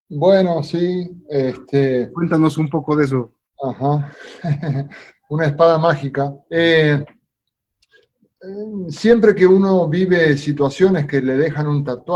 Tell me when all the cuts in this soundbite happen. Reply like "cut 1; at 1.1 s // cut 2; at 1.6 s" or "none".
cut 1; at 3.5 s // cut 2; at 6.4 s